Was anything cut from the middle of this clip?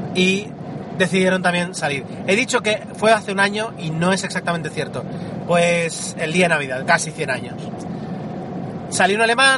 yes; 2 cuts; at 5.5 s, 6.8 s

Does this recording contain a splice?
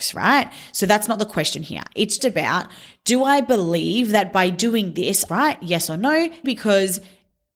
yes; 3 cuts; at 2.2 s, 5.3 s, 6.4 s

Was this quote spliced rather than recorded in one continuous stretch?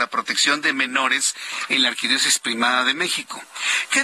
no; 0 cuts

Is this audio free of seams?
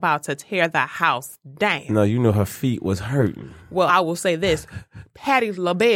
yes; 0 cuts

